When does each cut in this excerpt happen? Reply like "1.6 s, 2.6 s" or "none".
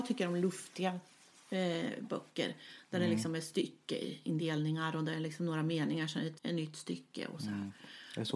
6.4 s